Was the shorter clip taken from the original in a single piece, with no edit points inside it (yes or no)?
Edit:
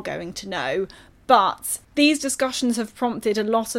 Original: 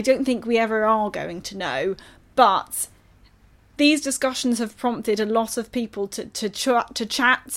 no